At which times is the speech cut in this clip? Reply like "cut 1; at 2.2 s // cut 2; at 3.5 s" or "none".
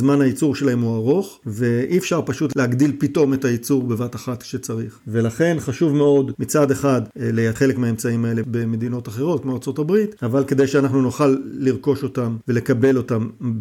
none